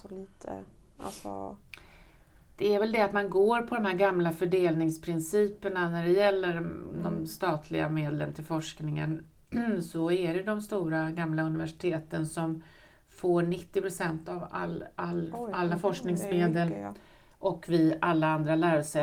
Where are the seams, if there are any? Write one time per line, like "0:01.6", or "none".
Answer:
none